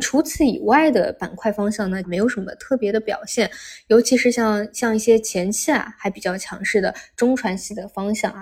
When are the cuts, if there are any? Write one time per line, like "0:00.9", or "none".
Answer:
0:02.0

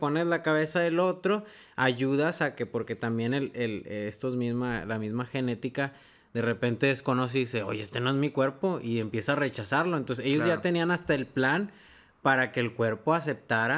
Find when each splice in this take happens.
none

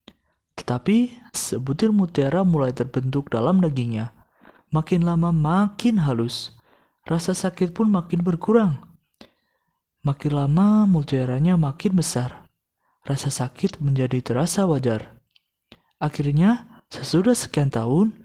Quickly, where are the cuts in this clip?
0:01.3

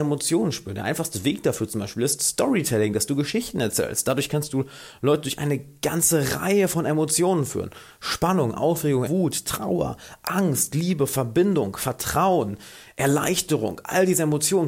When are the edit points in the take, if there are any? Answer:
0:09.1

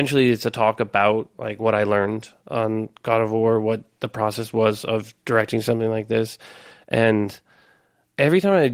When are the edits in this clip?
none

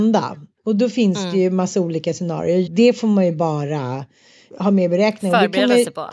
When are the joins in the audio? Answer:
0:02.7
0:04.5

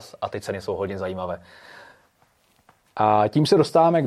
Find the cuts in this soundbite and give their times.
0:02.8

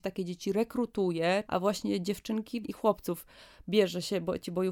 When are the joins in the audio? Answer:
0:01.5
0:02.6

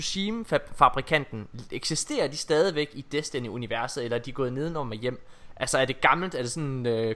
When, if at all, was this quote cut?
none

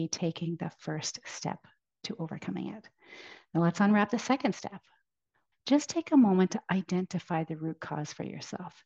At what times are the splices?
0:05.5

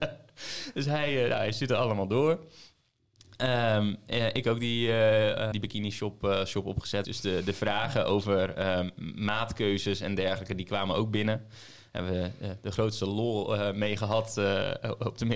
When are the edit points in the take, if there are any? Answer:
0:05.5
0:07.0

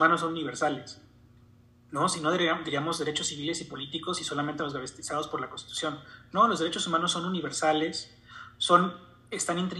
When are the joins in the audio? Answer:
none

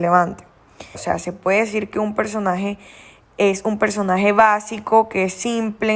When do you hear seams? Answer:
0:00.9

